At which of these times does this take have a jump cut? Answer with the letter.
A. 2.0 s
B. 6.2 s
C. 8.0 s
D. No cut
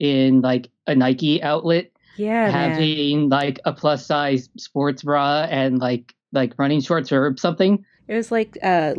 D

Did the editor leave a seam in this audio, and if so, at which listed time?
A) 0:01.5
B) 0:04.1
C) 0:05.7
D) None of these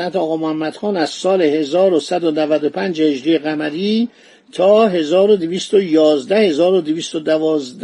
D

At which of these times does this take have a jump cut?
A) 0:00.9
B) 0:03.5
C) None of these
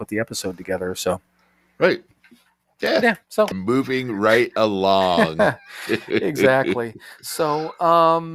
B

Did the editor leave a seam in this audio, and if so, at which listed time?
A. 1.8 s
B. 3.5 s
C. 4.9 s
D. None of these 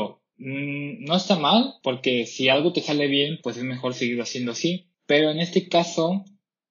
C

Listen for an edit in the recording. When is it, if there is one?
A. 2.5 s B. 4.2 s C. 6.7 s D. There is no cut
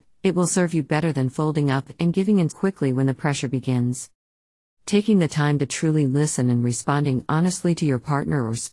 A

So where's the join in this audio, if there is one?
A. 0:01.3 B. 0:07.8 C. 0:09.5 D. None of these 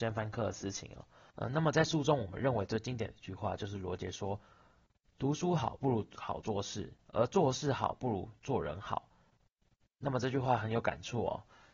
A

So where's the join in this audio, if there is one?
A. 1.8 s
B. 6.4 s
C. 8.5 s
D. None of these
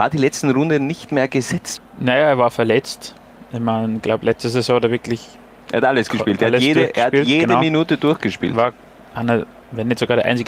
A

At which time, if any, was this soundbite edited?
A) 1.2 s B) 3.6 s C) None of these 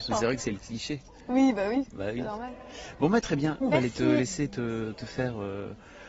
B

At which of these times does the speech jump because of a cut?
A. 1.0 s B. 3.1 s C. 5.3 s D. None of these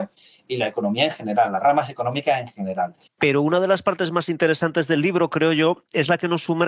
B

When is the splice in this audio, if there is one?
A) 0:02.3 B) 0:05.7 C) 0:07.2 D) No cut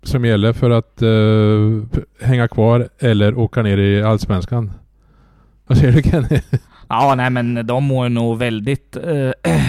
B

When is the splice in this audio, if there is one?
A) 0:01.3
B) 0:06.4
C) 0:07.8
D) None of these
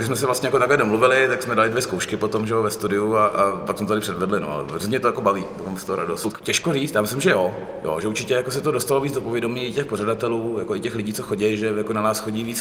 B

